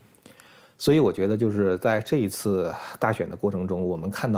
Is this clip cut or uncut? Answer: uncut